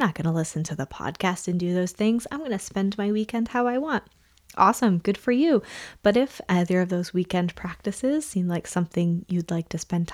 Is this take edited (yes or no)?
no